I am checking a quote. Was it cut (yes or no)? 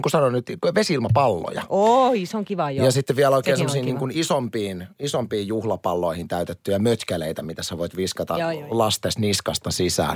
no